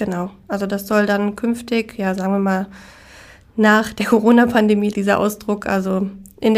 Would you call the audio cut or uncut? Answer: cut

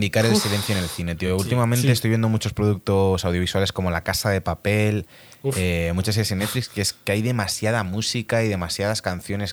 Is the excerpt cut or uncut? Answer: uncut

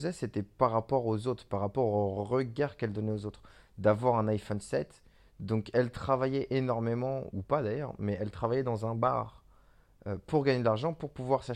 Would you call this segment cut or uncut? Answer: cut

